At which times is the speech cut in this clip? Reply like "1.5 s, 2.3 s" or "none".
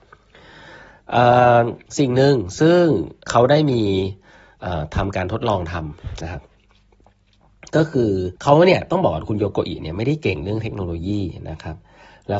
1.9 s, 3.3 s, 8.4 s